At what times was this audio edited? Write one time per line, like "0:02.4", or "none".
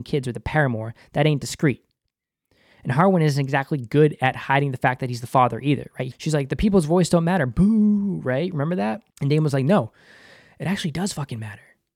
0:06.1
0:09.1